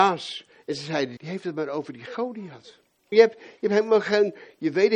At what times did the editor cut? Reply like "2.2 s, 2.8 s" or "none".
1.2 s, 3.1 s